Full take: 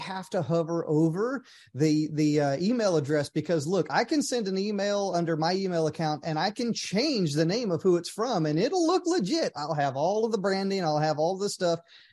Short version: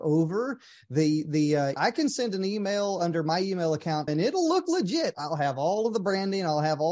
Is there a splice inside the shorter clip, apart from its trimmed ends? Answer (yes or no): yes